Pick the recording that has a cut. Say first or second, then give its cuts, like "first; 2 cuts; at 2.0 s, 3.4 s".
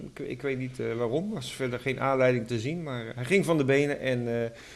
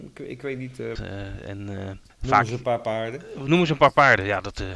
second; 1 cut; at 1.0 s